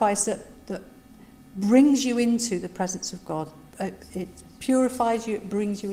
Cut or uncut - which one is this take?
uncut